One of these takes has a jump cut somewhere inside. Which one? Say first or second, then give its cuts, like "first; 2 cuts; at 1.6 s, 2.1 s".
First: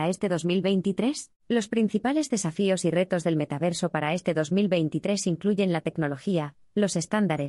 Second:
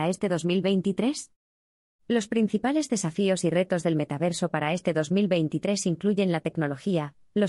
first; 1 cut; at 1.4 s